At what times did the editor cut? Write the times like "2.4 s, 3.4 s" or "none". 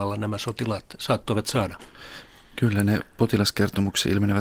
none